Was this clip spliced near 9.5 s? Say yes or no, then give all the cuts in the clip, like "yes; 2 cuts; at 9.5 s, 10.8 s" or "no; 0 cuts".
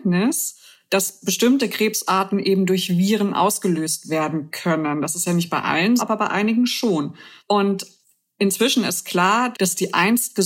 yes; 3 cuts; at 6.0 s, 7.4 s, 9.5 s